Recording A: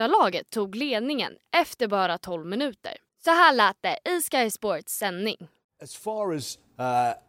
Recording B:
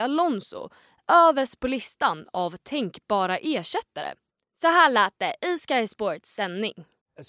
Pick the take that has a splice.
A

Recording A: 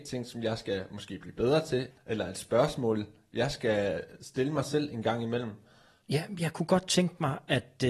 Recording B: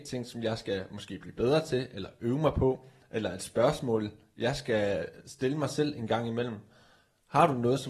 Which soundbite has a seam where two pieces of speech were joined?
A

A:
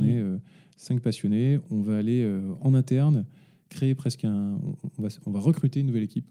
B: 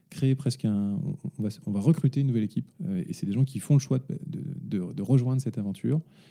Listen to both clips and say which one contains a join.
B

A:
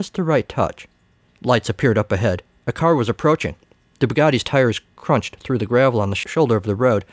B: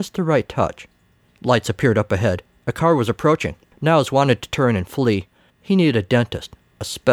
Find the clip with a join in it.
B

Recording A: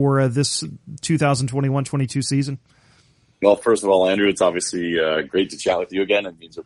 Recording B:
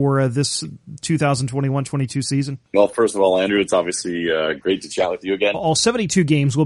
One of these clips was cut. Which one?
B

